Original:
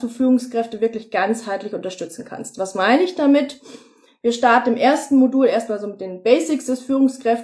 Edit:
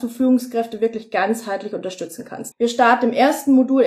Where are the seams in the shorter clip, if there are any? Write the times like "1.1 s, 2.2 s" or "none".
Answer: 2.5 s